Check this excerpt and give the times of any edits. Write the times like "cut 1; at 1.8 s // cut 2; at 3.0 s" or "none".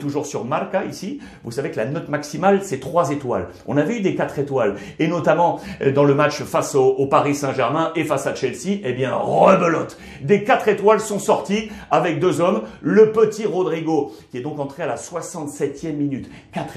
none